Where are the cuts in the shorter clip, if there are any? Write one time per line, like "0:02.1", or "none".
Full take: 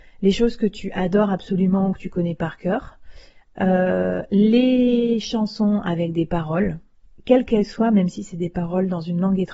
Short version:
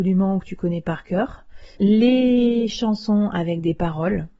0:01.8